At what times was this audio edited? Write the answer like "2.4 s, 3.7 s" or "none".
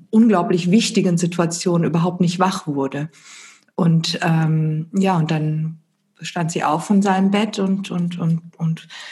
none